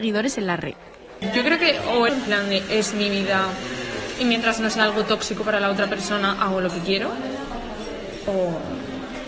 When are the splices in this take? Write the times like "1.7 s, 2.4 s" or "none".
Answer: 2.1 s